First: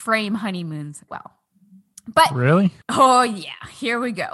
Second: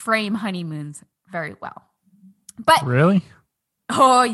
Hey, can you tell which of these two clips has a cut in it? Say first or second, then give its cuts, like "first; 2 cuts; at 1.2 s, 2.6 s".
first; 2 cuts; at 1.1 s, 2.8 s